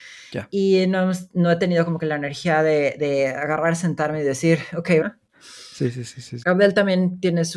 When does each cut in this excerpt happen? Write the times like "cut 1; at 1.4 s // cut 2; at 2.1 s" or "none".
cut 1; at 5.0 s // cut 2; at 6.4 s